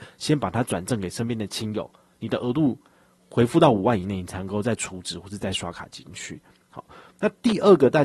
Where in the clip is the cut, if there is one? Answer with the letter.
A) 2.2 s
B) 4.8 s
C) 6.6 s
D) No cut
D